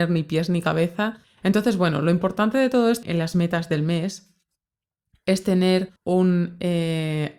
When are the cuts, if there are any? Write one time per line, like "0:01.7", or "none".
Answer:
0:01.2
0:03.0
0:06.0